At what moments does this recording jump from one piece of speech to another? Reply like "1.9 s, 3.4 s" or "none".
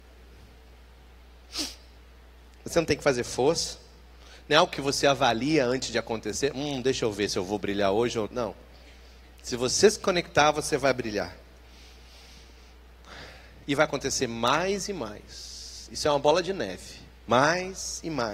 8.3 s, 13.6 s